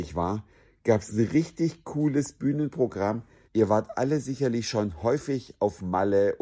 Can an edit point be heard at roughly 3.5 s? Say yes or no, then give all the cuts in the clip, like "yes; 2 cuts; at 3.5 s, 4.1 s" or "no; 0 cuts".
yes; 1 cut; at 3.5 s